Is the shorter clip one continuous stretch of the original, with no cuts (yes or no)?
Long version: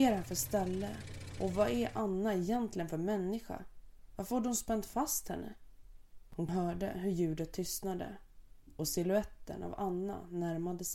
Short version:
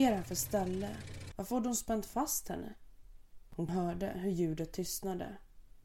no